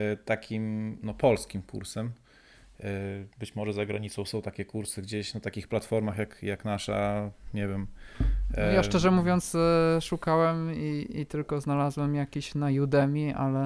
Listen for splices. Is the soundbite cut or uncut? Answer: uncut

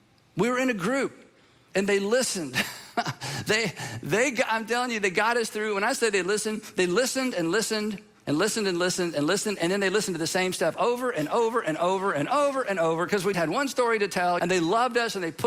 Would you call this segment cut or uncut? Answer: cut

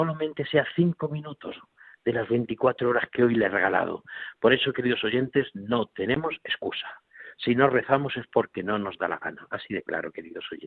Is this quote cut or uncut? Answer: uncut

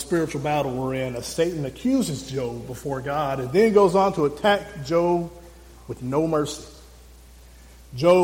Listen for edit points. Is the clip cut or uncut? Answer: uncut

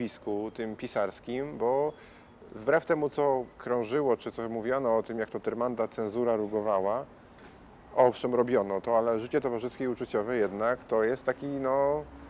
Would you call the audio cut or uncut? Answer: cut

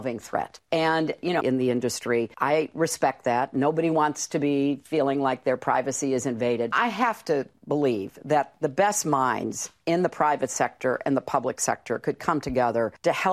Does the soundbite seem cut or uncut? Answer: cut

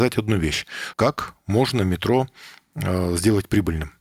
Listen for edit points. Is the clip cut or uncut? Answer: cut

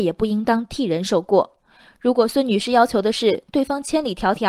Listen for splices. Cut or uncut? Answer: uncut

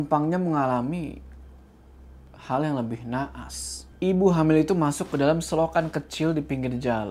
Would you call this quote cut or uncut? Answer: cut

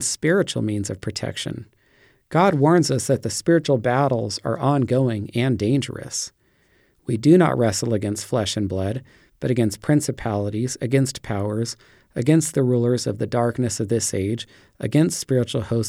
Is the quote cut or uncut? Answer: uncut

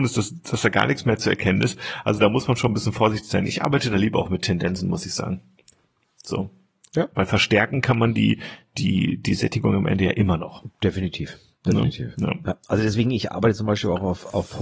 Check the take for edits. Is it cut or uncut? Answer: uncut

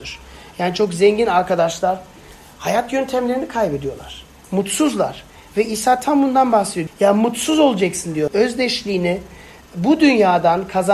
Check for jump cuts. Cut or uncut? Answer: cut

